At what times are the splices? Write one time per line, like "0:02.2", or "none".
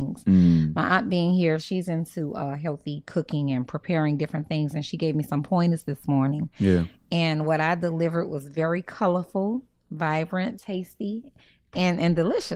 0:10.6